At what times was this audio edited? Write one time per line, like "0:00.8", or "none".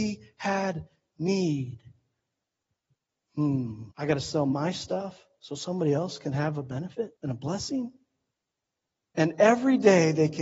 0:03.9
0:07.2